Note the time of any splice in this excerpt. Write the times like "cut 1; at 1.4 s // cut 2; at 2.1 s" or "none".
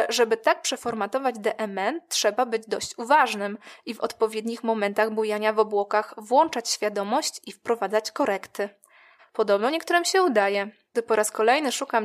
cut 1; at 9.2 s // cut 2; at 10.9 s